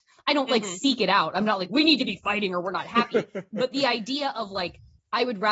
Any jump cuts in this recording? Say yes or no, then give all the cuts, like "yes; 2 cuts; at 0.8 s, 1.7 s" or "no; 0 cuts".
no; 0 cuts